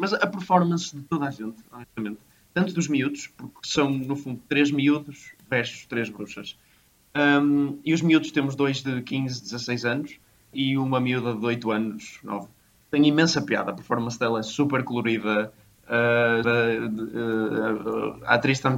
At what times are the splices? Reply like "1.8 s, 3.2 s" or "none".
10.5 s, 16.4 s